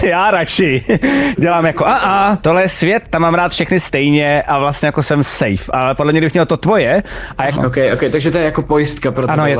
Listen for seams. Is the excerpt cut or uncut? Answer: cut